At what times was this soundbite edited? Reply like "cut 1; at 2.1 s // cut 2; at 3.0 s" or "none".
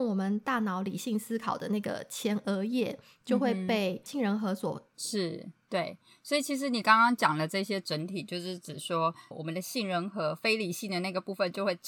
cut 1; at 4.9 s // cut 2; at 9.3 s